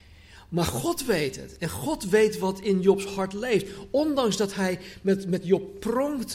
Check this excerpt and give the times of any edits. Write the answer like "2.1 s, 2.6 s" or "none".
none